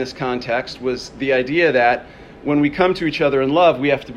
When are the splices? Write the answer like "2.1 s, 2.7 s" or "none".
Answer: none